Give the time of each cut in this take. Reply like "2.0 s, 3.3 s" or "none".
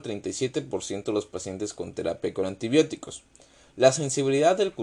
none